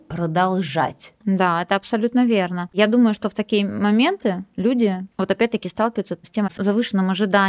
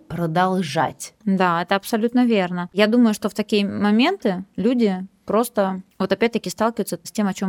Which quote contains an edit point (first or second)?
first